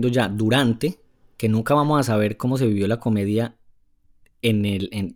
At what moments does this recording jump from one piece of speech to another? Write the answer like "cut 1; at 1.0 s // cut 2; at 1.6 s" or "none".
none

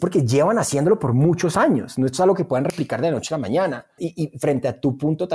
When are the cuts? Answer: cut 1; at 4.0 s

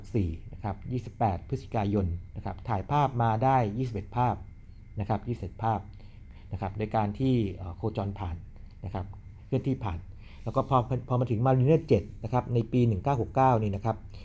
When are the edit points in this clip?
none

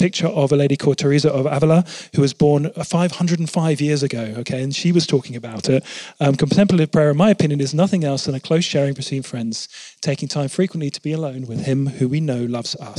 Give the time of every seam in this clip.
none

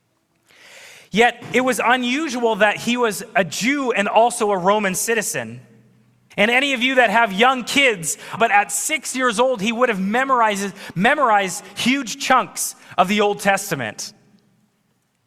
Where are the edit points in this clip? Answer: cut 1; at 6.3 s // cut 2; at 8.4 s

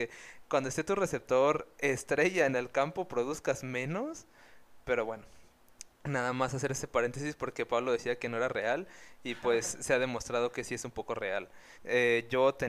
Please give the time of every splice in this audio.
cut 1; at 11.7 s

